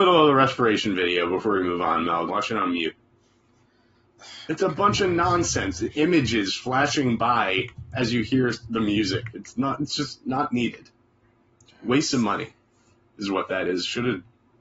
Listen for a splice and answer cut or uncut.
cut